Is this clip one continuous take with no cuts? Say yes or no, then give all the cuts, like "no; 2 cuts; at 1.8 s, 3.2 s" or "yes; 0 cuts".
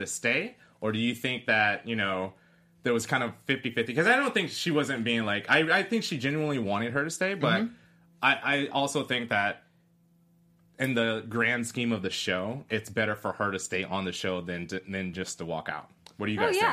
yes; 0 cuts